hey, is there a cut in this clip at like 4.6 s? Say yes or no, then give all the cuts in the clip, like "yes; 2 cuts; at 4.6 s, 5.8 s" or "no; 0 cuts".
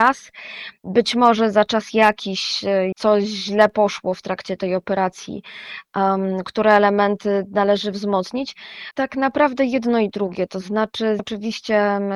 no; 3 cuts; at 2.9 s, 8.9 s, 11.2 s